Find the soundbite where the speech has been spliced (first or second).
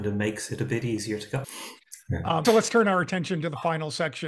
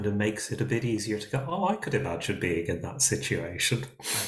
first